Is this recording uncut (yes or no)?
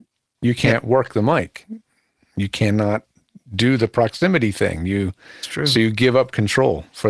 yes